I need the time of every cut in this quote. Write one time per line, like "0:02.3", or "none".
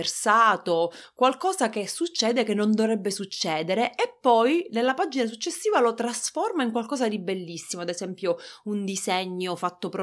none